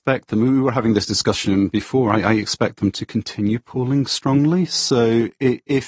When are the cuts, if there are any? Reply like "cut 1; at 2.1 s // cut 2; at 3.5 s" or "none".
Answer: none